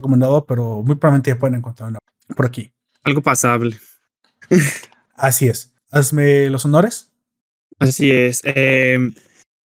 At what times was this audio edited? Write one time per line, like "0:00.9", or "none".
0:05.8